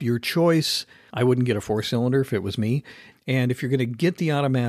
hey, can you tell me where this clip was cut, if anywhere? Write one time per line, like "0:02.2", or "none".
0:01.1
0:03.1

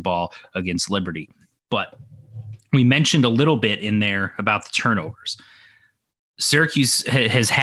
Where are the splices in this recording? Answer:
none

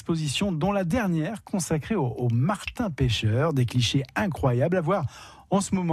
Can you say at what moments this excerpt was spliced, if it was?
none

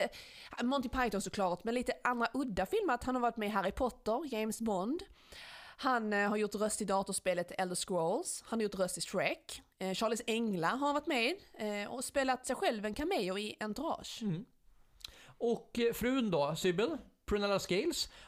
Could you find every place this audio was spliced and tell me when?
none

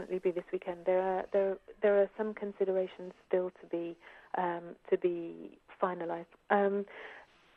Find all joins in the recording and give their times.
none

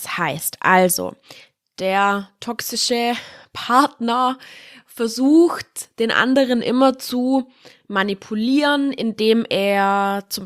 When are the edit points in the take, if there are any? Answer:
none

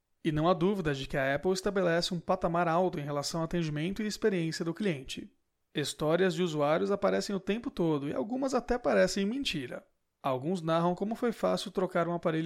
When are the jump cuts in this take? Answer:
none

